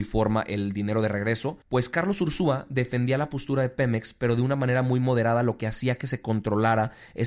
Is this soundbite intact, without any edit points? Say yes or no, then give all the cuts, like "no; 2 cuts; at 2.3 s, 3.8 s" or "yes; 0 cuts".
no; 1 cut; at 1.6 s